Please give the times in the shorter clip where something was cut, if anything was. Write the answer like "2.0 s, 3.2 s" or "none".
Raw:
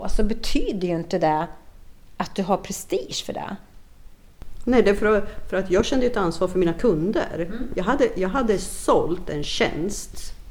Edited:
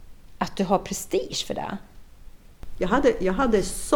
2.8 s